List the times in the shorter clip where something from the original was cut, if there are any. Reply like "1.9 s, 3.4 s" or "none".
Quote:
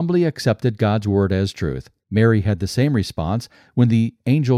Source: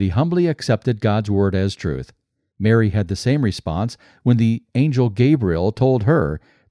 2.0 s